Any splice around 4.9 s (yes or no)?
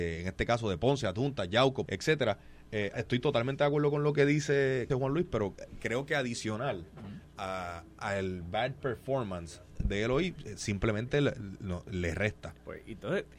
yes